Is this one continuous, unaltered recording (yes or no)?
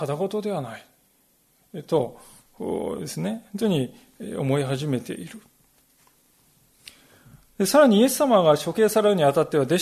yes